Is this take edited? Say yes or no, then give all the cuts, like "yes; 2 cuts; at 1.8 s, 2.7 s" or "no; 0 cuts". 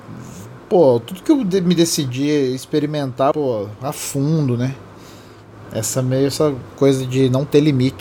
yes; 1 cut; at 3.3 s